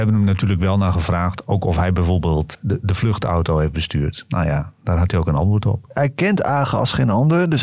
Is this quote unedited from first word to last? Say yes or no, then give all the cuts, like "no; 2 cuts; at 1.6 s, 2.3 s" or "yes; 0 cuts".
no; 1 cut; at 5.9 s